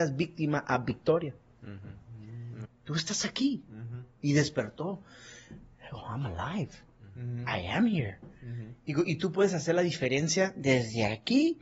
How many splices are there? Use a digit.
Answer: 1